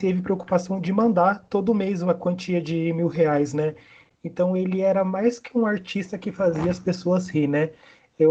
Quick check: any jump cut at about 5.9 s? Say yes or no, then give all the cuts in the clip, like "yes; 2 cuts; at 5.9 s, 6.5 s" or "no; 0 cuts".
no; 1 cut; at 4.2 s